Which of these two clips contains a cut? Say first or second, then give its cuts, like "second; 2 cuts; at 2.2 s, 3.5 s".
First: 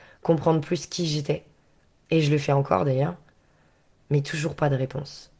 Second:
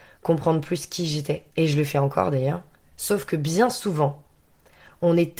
second; 2 cuts; at 1.5 s, 2.8 s